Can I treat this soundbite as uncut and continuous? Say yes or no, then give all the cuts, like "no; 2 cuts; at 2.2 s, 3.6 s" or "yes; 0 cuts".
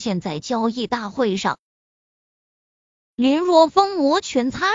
no; 1 cut; at 2.3 s